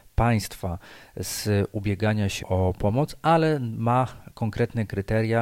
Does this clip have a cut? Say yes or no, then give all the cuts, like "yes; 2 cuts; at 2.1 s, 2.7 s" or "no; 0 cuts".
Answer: yes; 1 cut; at 2.4 s